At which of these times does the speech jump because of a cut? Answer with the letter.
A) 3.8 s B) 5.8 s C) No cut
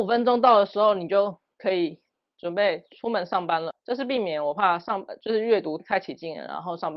B